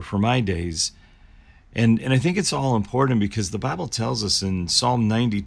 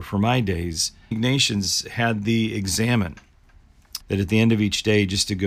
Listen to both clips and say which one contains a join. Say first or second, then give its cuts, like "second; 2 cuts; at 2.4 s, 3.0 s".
second; 2 cuts; at 1.1 s, 4.0 s